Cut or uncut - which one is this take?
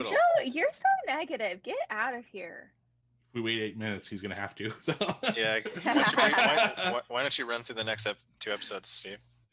uncut